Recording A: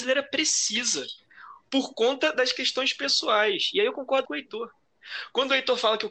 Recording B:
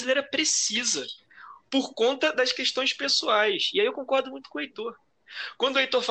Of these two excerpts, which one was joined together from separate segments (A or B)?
A